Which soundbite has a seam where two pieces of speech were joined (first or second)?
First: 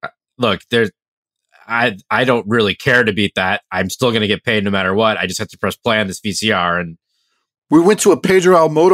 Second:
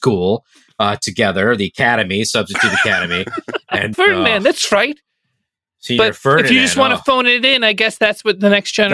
second